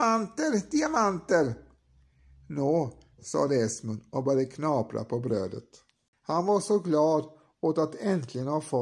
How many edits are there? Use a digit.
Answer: 2